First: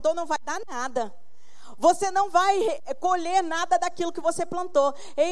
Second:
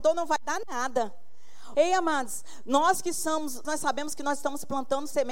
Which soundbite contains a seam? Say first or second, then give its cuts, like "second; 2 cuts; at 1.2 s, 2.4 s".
second; 2 cuts; at 1.7 s, 3.6 s